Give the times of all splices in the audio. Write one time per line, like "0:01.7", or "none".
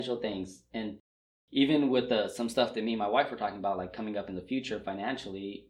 none

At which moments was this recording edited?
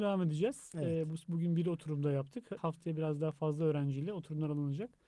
0:02.6

